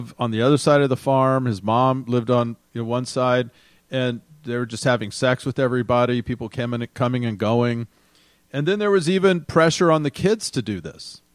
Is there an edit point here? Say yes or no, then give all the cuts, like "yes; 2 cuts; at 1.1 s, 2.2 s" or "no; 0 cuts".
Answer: no; 0 cuts